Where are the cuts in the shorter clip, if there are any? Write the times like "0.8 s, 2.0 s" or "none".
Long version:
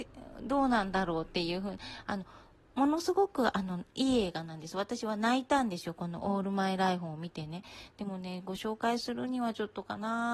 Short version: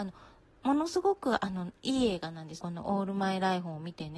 2.6 s